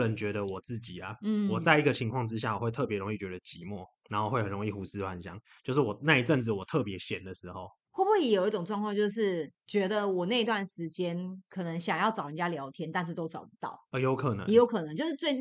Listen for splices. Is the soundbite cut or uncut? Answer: uncut